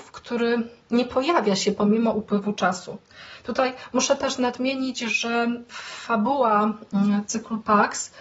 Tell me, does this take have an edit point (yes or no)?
no